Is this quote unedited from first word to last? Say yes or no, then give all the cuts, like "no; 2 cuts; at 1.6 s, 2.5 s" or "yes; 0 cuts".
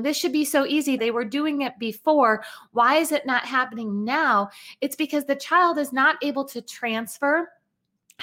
no; 1 cut; at 1.0 s